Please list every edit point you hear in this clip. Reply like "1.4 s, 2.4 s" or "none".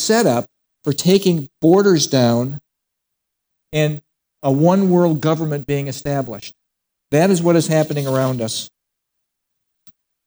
6.9 s